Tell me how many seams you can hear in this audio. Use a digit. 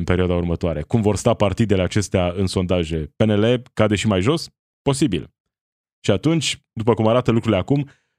1